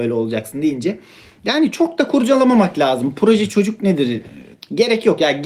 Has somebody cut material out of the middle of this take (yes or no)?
no